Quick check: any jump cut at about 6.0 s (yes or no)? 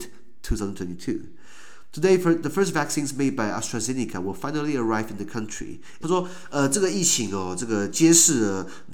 yes